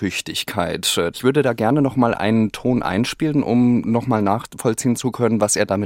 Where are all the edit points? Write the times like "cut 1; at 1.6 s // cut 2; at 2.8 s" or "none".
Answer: cut 1; at 1.1 s